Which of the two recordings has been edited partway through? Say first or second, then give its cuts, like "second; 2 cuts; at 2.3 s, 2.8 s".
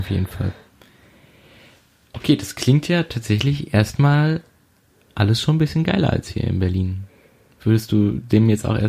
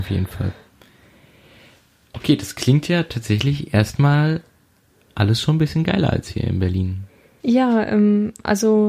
second; 1 cut; at 7.4 s